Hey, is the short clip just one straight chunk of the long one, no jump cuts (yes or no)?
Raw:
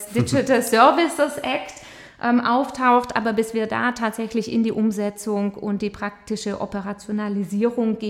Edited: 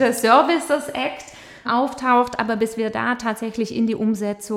no